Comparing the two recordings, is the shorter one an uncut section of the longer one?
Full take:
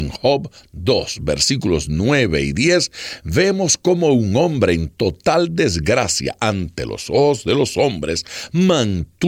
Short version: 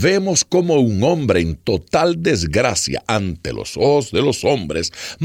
yes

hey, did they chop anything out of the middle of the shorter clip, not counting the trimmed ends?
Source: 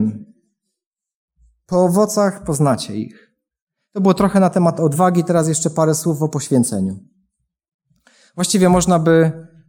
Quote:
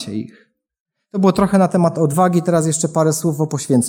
no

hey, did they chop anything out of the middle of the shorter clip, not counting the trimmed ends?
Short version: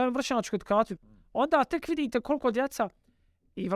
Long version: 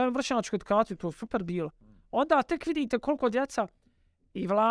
yes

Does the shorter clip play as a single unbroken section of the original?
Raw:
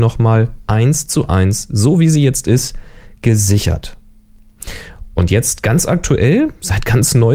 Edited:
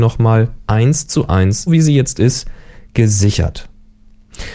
no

